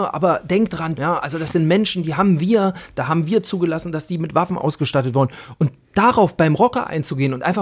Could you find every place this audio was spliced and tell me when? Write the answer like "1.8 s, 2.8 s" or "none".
1.0 s